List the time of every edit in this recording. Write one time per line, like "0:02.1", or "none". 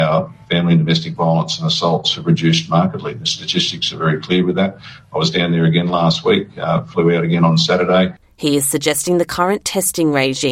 0:08.2